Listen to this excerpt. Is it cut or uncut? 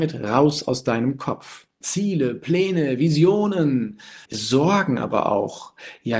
cut